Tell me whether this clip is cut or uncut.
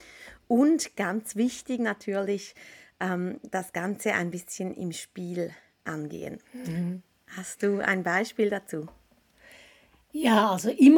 cut